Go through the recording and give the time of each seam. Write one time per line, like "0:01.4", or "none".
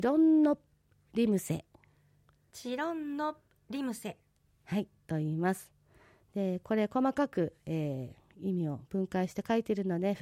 none